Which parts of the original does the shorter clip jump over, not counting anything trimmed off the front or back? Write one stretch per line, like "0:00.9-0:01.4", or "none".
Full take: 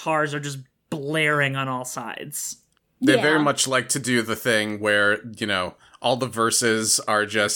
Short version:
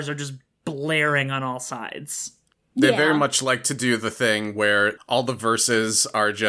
0:05.2-0:05.9